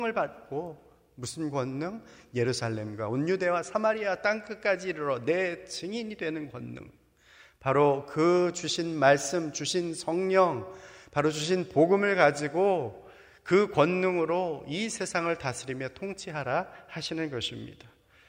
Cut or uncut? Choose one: uncut